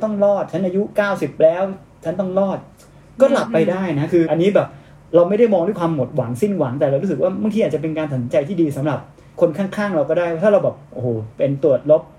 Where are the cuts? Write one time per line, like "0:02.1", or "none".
0:04.3